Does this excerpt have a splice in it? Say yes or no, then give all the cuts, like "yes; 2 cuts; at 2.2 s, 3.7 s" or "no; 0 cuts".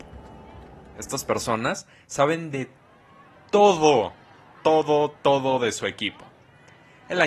yes; 1 cut; at 4.5 s